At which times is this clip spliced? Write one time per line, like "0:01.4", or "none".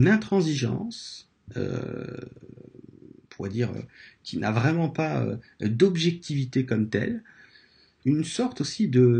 0:08.0